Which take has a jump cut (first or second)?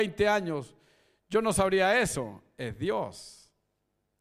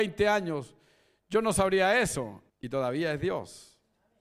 second